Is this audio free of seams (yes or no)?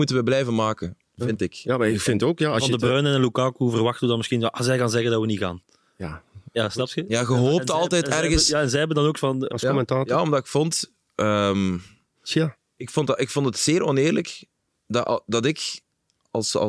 no